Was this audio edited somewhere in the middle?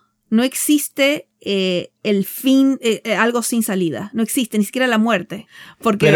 no; 0 cuts

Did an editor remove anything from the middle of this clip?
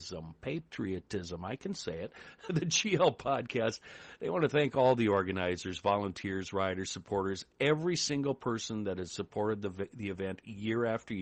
no; 0 cuts

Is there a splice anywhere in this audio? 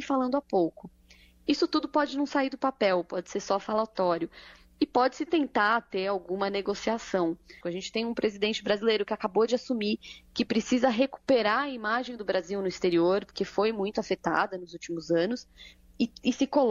yes; 1 cut; at 7.6 s

